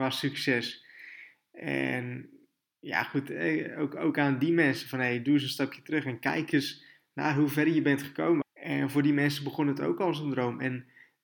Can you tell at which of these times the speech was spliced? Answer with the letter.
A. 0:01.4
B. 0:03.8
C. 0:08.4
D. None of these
C